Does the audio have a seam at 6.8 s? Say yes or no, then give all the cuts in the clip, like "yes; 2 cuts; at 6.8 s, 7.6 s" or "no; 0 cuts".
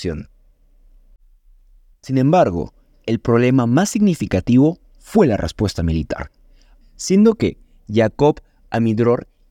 yes; 2 cuts; at 1.9 s, 6.8 s